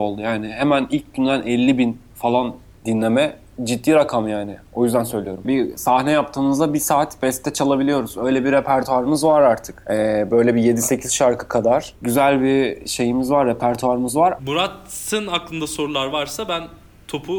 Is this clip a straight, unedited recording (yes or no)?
no